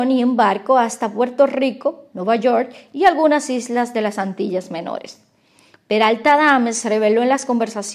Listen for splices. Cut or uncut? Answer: cut